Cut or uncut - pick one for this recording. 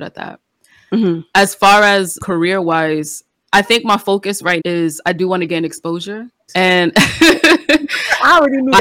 cut